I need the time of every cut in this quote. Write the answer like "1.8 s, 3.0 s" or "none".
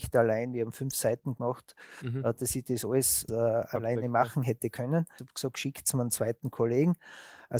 3.3 s, 5.2 s